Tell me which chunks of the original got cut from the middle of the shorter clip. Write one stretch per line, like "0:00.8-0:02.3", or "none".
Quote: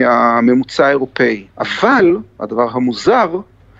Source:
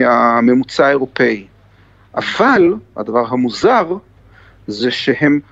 0:01.5-0:02.1

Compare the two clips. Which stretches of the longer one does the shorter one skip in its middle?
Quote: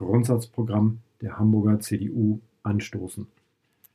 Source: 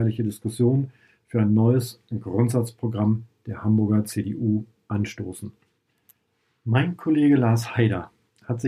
none

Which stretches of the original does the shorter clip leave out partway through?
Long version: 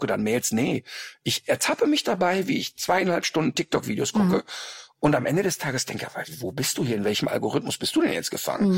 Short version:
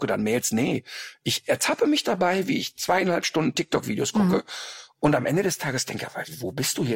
none

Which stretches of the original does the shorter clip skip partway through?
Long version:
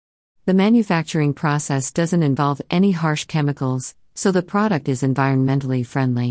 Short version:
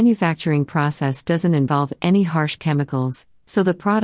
none

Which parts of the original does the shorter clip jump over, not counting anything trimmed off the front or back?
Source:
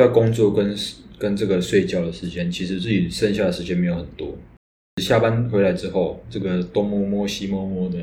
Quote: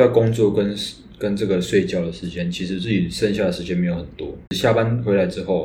0:04.5-0:04.9

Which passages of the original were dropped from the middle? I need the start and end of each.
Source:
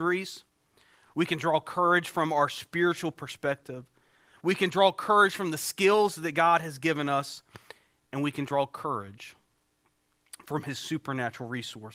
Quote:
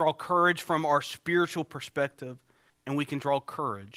0:04.2-0:07.9

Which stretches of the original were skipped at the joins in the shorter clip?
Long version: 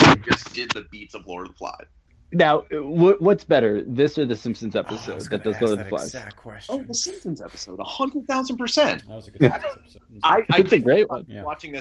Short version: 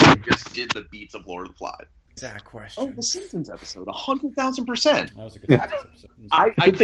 0:02.2-0:06.1

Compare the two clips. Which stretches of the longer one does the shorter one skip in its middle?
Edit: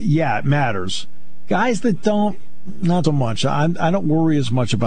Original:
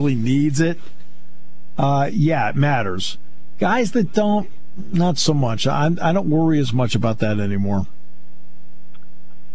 0:05.1-0:05.3

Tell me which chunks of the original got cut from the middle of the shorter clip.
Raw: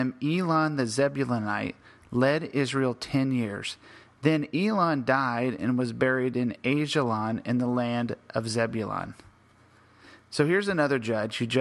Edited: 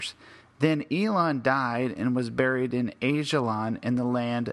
none

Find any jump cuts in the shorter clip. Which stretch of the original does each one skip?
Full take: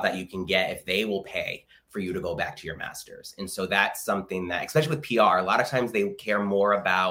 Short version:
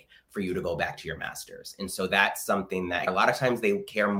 0:04.7-0:05.4

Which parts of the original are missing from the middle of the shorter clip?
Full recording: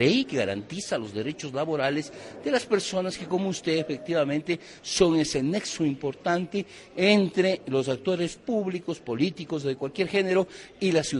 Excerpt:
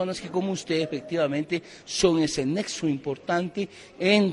none

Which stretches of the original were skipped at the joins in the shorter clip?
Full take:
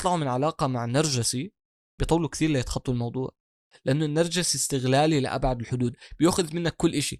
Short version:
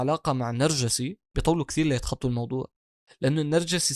0:01.6-0:01.9

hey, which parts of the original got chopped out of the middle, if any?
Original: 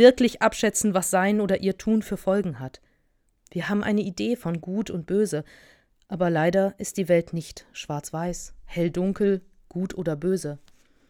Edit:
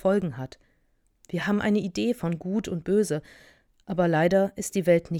none

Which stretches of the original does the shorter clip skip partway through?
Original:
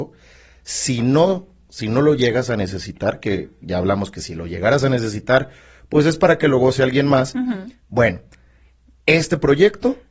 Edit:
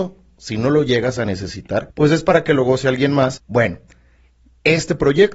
0:03.2-0:05.8
0:07.3-0:07.8

